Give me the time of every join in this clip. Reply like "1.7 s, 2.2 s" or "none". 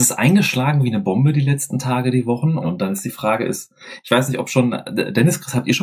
2.6 s